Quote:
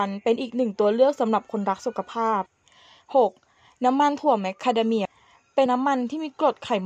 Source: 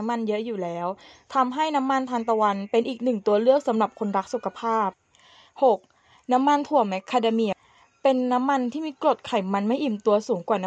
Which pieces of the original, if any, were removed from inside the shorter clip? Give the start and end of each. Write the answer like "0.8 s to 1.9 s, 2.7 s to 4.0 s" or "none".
8.1 s to 8.3 s